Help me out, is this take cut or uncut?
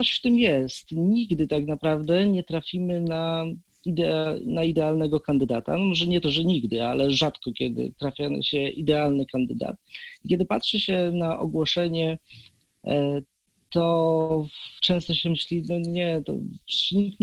uncut